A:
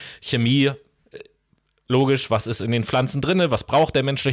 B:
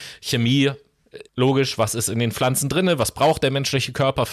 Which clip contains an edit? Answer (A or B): B